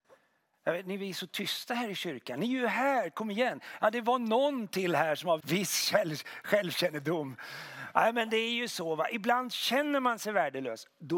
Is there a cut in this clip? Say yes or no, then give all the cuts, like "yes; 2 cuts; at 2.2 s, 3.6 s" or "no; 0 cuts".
yes; 1 cut; at 5.4 s